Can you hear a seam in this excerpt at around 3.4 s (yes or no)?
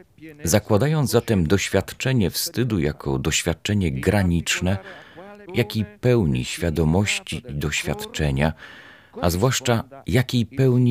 no